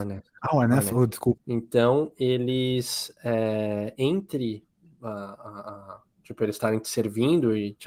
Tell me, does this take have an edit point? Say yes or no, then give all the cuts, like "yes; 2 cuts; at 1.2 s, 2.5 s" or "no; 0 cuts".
yes; 1 cut; at 1.4 s